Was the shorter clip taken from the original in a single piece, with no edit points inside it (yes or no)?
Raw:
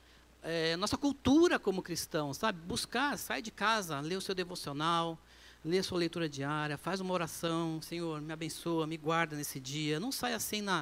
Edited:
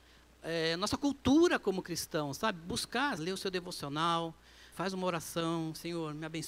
no